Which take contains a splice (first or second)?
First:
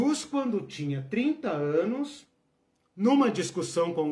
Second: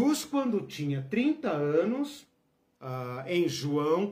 second